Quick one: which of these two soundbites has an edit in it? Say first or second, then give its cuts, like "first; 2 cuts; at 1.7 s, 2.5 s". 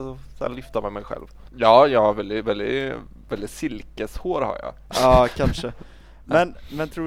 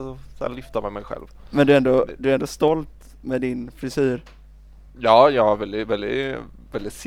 first; 2 cuts; at 1.5 s, 4.9 s